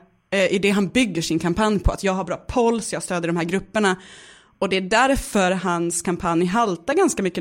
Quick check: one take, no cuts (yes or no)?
yes